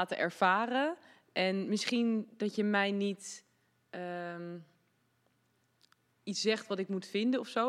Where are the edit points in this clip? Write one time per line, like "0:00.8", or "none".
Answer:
none